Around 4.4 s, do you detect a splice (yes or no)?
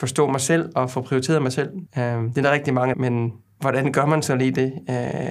no